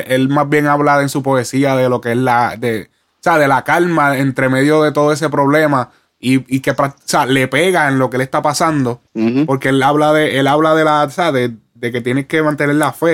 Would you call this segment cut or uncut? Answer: cut